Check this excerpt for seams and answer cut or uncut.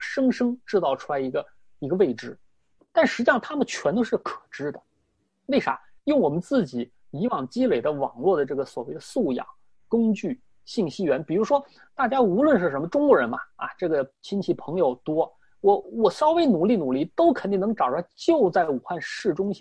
uncut